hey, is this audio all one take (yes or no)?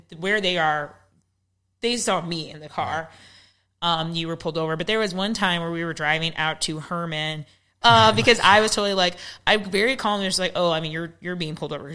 no